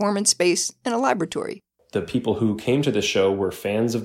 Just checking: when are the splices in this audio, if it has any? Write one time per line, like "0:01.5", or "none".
none